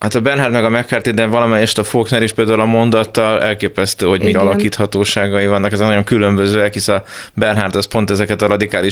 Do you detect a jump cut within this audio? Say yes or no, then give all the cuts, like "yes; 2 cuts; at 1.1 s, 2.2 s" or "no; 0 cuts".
yes; 1 cut; at 4.3 s